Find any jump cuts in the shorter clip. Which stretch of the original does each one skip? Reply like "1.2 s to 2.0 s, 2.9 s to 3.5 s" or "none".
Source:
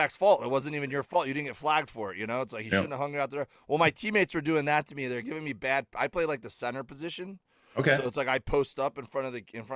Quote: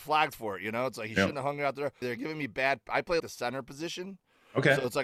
3.6 s to 5.1 s, 6.3 s to 6.4 s